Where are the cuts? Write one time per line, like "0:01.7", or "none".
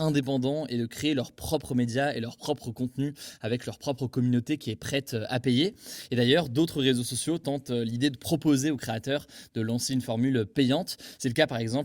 none

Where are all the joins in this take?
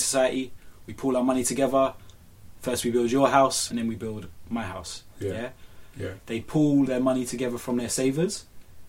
0:03.7
0:05.9

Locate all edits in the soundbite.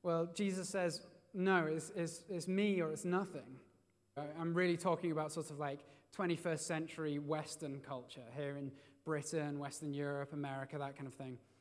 0:04.2

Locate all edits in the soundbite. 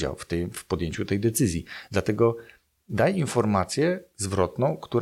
none

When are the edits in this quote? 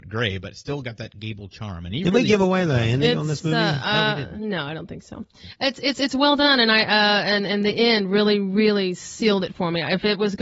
none

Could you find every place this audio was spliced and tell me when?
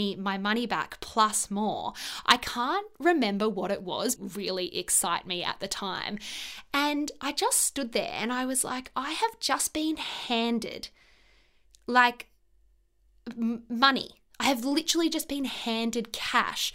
0:04.2

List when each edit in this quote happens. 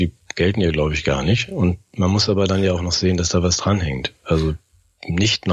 none

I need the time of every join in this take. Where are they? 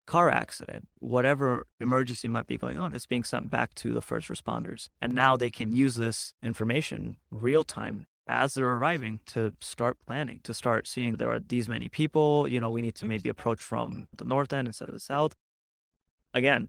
0:04.9

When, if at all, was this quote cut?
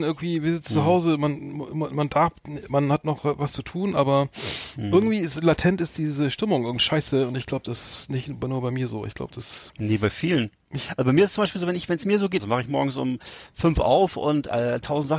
0:06.8
0:12.4

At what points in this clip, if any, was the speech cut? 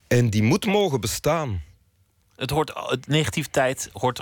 none

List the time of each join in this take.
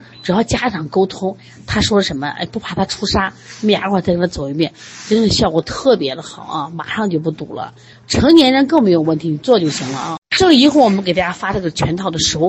none

